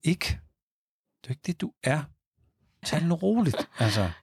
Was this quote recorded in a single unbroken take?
no; 1 cut; at 2.8 s

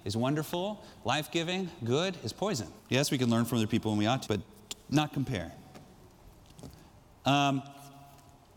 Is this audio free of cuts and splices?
no; 2 cuts; at 2.8 s, 4.3 s

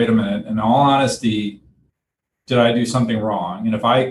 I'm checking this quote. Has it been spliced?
no; 0 cuts

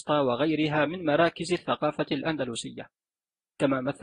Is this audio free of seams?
yes; 0 cuts

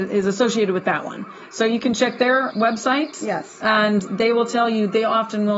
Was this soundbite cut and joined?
yes; 1 cut; at 2.5 s

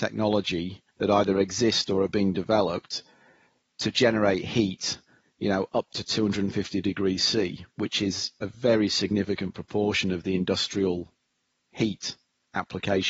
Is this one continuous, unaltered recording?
no; 1 cut; at 0.9 s

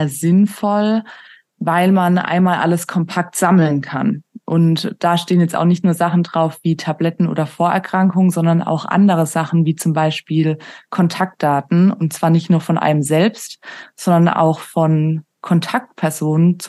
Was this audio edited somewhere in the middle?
no; 0 cuts

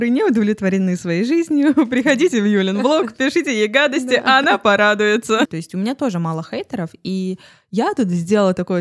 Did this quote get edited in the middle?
yes; 1 cut; at 5.5 s

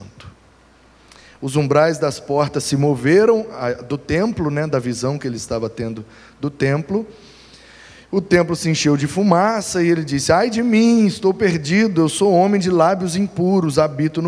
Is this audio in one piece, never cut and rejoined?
yes; 0 cuts

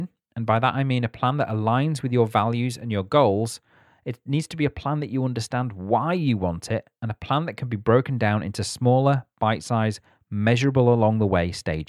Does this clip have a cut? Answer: no; 0 cuts

